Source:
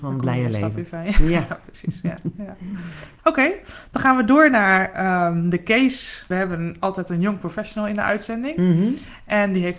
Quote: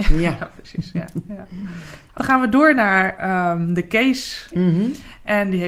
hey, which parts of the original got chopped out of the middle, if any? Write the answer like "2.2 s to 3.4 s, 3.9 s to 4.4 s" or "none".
3.2 s to 3.9 s, 6.3 s to 8.5 s